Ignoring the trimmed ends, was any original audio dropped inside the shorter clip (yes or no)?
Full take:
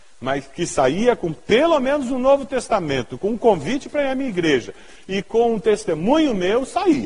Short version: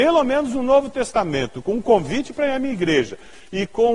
no